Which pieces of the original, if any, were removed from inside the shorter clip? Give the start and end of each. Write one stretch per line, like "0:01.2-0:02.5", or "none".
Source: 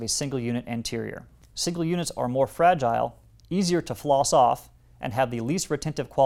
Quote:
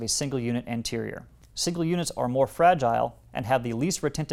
0:03.3-0:04.9